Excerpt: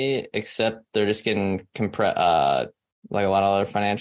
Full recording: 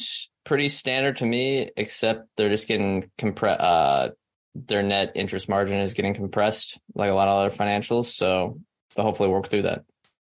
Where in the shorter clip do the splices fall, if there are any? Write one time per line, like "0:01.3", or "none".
0:03.0

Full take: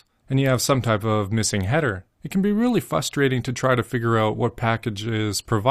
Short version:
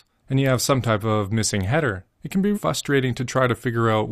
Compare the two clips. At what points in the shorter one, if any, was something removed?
0:02.5

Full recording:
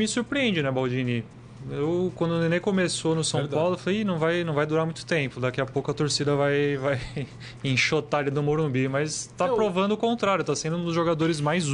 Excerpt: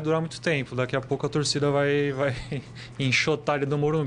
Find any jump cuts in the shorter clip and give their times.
none

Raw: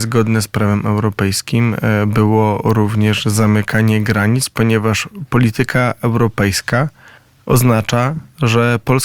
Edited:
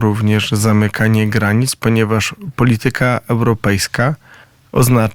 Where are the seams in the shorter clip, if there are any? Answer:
none

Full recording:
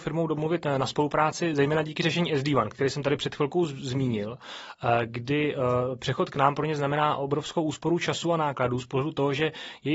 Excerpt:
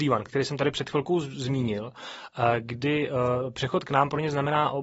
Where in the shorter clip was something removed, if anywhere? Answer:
none

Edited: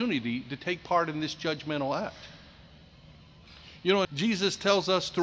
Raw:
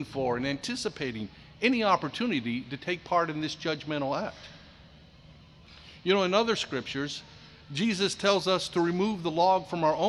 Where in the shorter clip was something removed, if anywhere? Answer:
0:04.0

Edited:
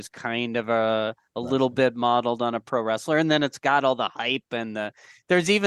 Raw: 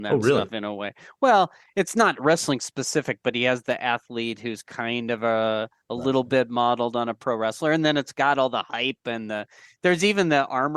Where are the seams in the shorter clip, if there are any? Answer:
none

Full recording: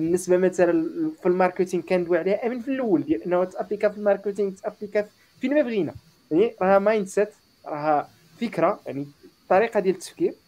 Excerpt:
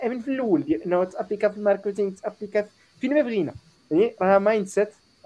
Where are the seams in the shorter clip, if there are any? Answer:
none

